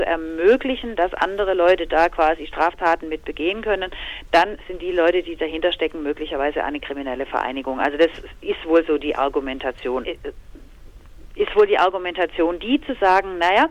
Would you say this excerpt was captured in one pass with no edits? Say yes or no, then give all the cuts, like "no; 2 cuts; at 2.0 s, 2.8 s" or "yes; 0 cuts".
no; 1 cut; at 10.0 s